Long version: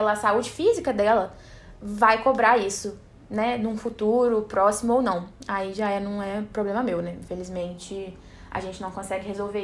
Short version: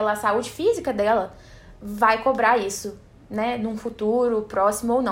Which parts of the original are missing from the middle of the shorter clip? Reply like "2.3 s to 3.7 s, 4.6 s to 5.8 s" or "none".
none